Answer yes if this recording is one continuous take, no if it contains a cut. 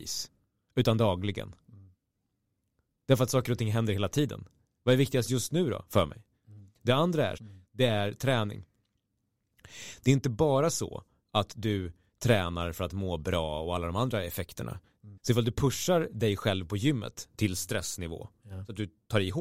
no